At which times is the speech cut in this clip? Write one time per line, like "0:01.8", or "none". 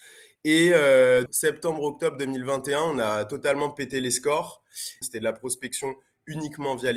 0:01.3
0:05.0